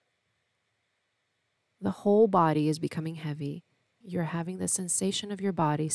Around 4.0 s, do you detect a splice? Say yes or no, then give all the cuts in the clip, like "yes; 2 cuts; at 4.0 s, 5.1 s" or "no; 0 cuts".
yes; 1 cut; at 4.0 s